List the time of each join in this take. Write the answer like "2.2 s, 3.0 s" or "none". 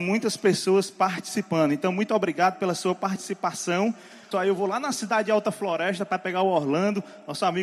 4.3 s